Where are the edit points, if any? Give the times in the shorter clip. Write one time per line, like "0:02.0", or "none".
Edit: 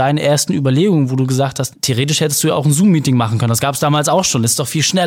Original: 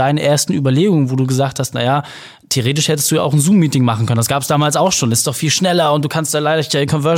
0:01.7